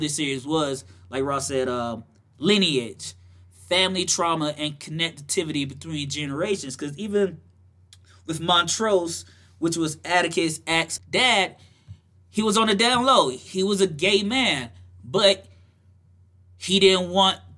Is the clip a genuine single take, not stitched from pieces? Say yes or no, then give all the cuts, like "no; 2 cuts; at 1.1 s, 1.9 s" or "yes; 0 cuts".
no; 1 cut; at 11.0 s